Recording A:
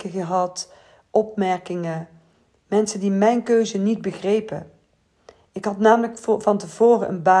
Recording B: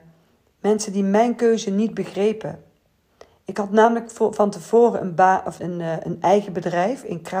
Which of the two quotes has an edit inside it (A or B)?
B